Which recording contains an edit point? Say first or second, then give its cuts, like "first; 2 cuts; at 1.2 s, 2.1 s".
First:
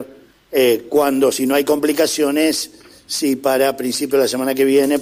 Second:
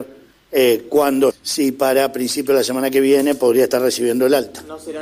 second; 1 cut; at 1.3 s